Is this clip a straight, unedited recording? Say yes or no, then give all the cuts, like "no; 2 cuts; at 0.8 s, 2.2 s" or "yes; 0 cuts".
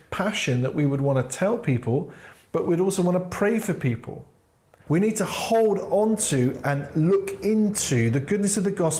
no; 1 cut; at 4.9 s